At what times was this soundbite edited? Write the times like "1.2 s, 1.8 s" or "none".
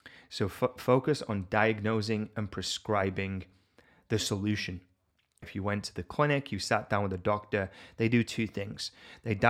5.4 s